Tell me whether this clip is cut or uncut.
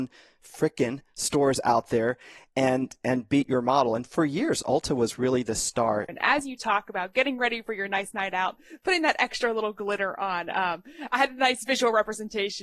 cut